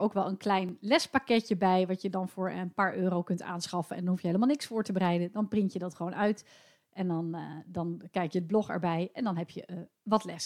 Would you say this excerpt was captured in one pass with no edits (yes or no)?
yes